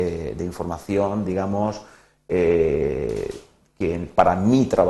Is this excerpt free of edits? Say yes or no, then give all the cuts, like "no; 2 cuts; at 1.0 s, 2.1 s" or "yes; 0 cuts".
yes; 0 cuts